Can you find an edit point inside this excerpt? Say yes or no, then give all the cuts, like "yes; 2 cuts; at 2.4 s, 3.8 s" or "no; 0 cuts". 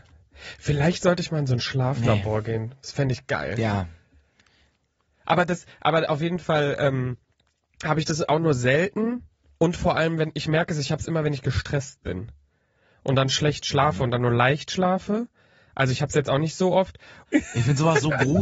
yes; 1 cut; at 17.3 s